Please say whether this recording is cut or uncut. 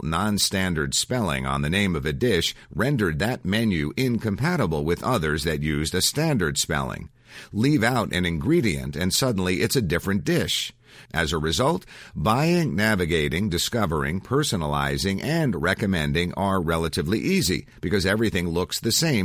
cut